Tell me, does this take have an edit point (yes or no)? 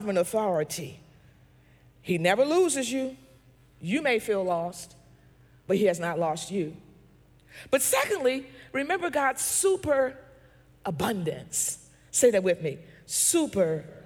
no